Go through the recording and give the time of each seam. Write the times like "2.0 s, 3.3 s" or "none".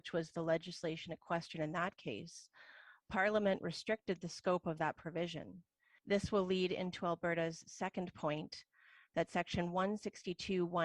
6.0 s